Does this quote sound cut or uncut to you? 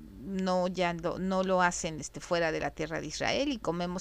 uncut